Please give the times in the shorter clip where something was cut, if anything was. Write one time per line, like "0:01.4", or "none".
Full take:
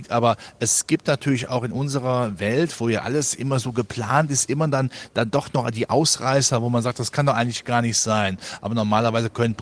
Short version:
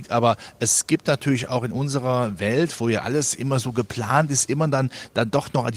none